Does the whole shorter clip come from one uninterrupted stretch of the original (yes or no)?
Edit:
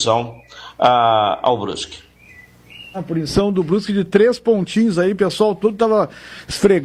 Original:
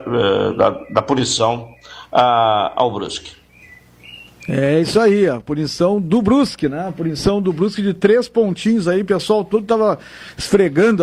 no